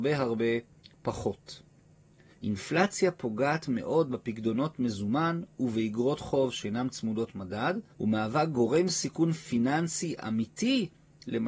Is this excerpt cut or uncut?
cut